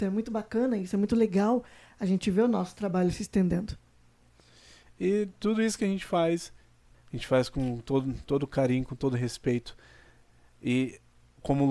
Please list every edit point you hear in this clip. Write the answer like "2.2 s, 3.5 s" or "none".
6.9 s